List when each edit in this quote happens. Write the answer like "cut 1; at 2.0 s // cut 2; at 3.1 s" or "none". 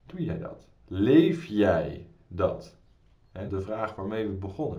cut 1; at 3.5 s

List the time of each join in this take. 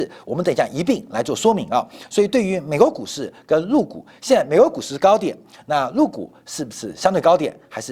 none

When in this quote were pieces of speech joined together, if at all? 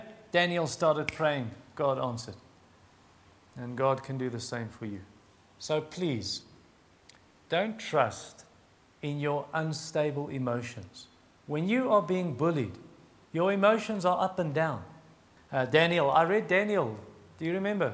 cut 1; at 15.4 s

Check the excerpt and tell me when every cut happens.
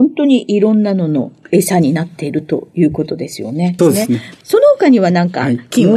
cut 1; at 3.8 s

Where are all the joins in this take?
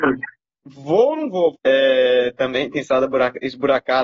cut 1; at 1.5 s

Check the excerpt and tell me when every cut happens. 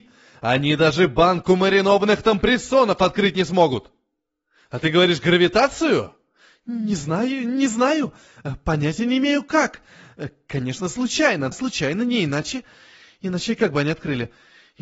cut 1; at 11.5 s

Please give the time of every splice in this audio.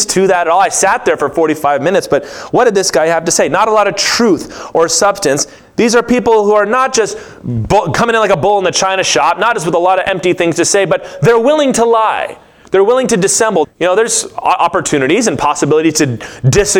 cut 1; at 5.6 s // cut 2; at 13.6 s

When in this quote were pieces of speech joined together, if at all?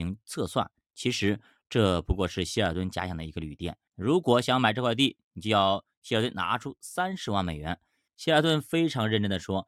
cut 1; at 3.9 s // cut 2; at 8.1 s

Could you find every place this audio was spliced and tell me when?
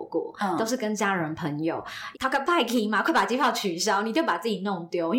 cut 1; at 2.1 s

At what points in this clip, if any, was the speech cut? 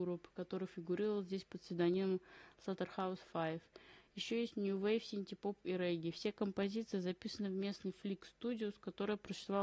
none

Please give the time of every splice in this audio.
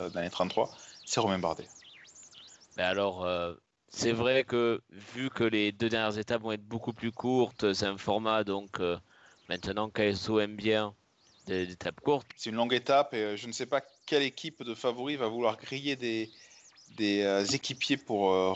cut 1; at 12.3 s

